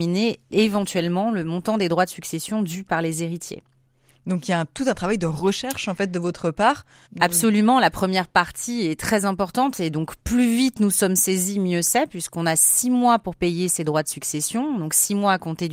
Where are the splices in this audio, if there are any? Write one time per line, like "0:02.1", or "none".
none